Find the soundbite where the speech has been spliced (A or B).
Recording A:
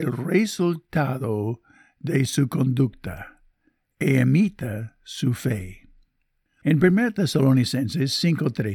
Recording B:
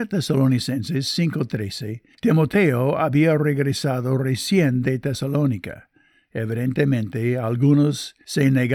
A